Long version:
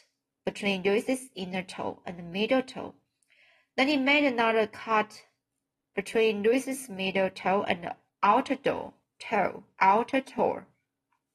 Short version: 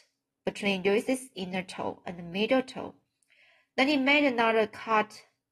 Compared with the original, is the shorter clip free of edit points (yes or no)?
yes